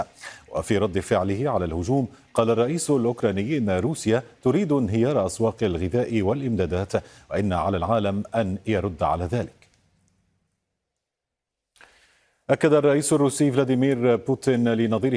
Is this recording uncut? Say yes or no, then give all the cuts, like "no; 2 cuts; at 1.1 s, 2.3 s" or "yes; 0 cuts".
yes; 0 cuts